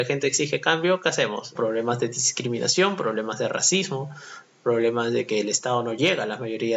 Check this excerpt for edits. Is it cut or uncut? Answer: cut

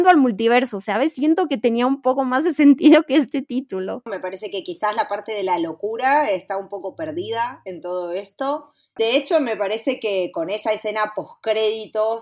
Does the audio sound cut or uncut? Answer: cut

